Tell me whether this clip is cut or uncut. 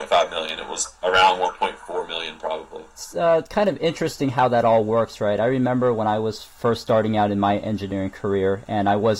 cut